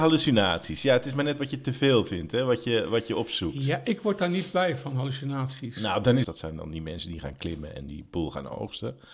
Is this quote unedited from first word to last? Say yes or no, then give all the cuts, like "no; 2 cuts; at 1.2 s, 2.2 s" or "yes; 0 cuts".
no; 1 cut; at 6.2 s